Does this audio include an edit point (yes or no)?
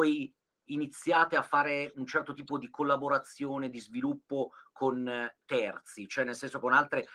no